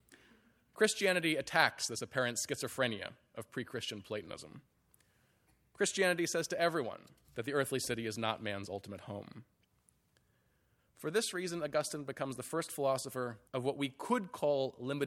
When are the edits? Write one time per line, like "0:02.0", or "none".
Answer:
0:07.2
0:13.5